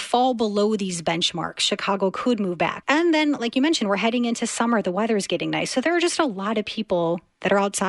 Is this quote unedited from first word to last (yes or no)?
no